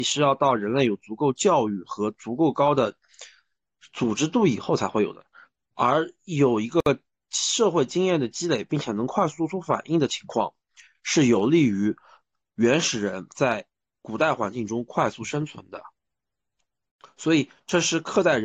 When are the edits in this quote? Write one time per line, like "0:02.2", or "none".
none